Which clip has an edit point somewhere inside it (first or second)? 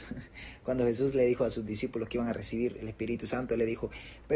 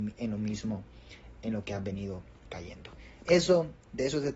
second